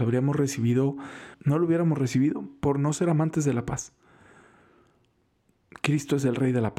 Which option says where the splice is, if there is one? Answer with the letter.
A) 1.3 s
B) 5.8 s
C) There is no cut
A